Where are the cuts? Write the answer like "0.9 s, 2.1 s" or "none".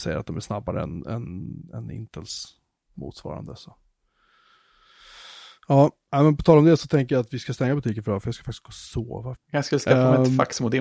5.6 s, 9.4 s